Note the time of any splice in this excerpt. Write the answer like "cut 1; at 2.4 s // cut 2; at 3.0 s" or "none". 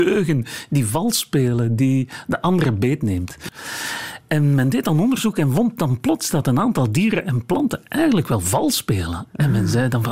cut 1; at 3.5 s